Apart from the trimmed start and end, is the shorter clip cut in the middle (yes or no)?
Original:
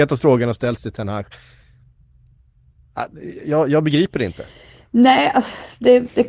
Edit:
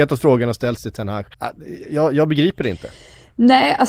yes